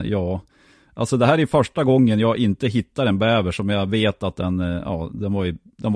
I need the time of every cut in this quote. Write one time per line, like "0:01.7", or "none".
none